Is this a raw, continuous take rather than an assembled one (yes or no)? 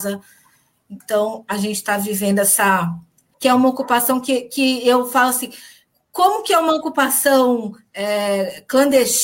no